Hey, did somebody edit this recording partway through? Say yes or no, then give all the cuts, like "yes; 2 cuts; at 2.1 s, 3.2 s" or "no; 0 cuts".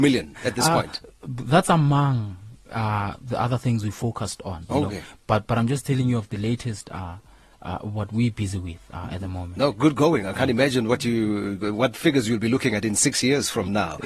no; 0 cuts